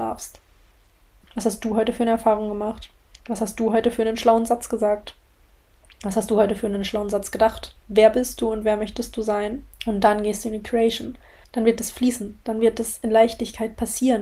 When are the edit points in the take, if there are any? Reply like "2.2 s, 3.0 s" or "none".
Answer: 1.2 s, 7.8 s, 9.7 s